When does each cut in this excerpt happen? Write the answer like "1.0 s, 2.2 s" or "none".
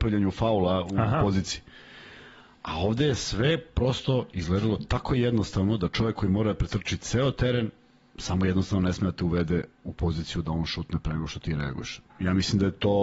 9.7 s, 12.0 s